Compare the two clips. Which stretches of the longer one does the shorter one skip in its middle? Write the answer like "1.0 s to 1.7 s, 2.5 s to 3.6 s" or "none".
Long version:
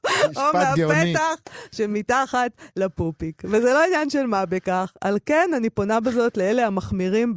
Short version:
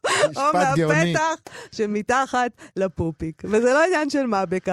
none